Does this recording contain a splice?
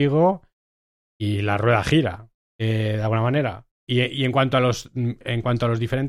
no; 0 cuts

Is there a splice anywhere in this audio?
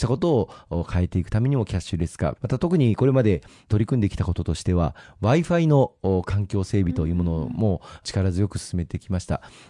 yes; 1 cut; at 2.4 s

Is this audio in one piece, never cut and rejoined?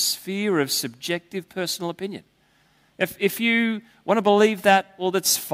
yes; 0 cuts

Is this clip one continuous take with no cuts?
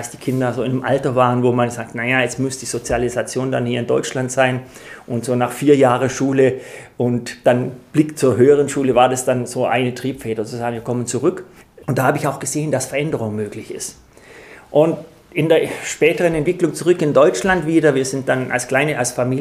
no; 1 cut; at 11.8 s

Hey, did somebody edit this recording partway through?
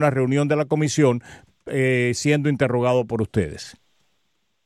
no; 0 cuts

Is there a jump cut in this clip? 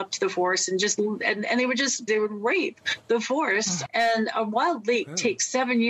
yes; 2 cuts; at 2.1 s, 3.9 s

